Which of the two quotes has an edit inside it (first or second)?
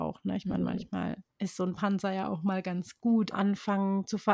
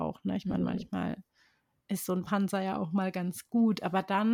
first